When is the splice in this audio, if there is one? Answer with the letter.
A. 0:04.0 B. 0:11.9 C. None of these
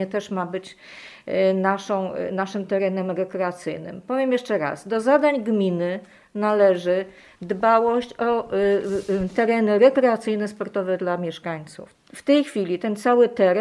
B